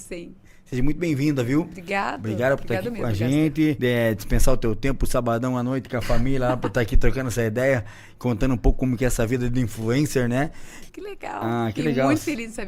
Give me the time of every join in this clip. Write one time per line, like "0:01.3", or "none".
0:03.8
0:10.9